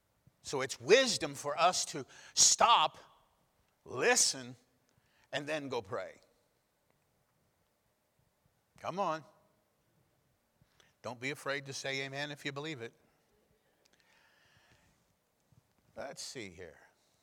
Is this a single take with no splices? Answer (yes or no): yes